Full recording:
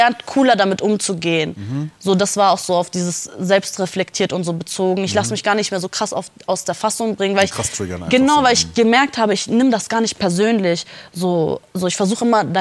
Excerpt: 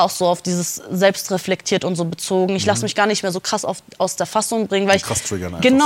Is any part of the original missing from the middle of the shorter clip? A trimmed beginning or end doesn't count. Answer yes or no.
no